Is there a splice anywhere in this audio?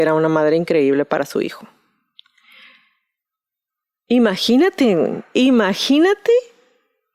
no; 0 cuts

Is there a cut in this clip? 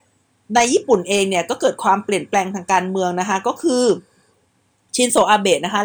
no; 0 cuts

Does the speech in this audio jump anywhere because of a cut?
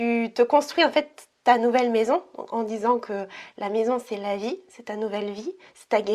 no; 0 cuts

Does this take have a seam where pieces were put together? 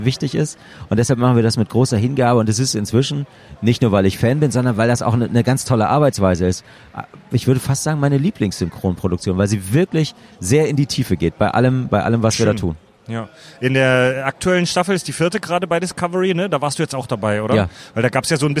no; 0 cuts

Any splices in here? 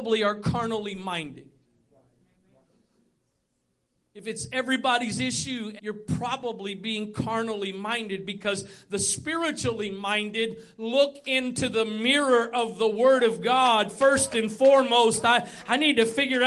yes; 1 cut; at 5.8 s

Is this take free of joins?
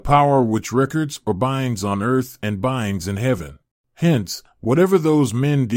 no; 1 cut; at 3.8 s

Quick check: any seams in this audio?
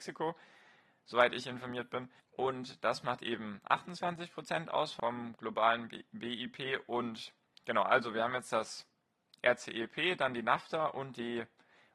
yes; 1 cut; at 2.2 s

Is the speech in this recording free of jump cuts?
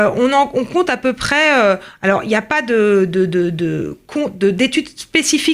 yes; 0 cuts

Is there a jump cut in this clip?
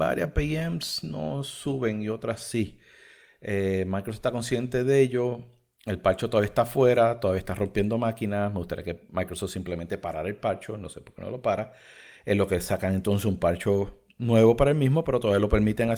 no; 0 cuts

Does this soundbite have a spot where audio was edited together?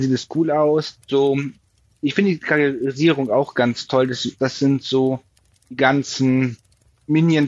yes; 2 cuts; at 1.0 s, 4.4 s

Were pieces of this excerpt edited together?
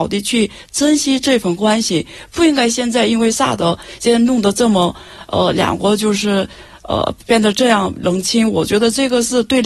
no; 0 cuts

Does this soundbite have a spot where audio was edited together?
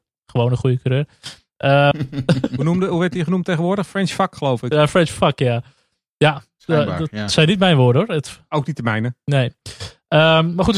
yes; 1 cut; at 1.9 s

